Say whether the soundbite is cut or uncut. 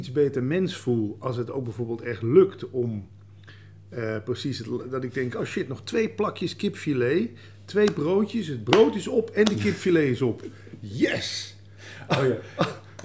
uncut